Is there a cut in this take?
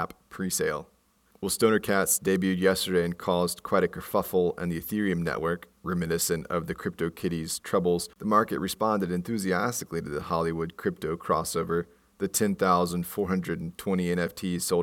no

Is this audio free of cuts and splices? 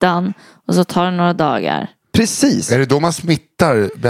yes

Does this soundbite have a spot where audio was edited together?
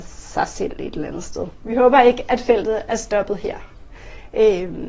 yes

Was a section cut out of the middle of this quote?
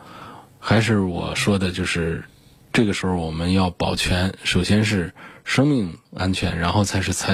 yes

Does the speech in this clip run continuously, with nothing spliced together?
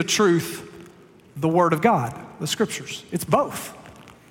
yes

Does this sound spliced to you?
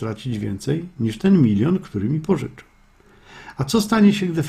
no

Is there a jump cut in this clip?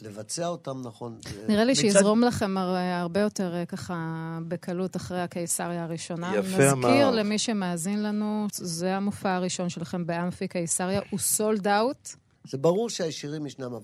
yes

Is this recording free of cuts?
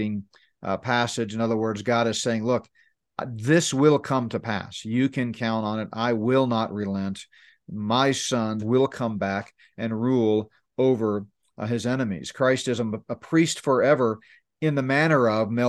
no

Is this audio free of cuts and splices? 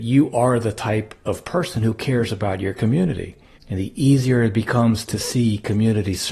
no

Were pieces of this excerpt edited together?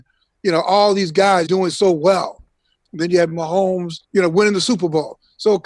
yes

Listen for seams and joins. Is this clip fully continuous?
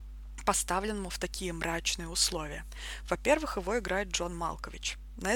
yes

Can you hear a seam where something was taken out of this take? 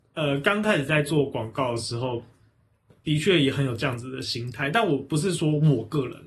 no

